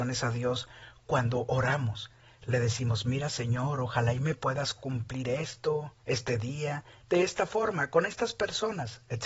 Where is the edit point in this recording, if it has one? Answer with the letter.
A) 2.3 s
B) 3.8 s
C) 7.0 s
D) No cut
C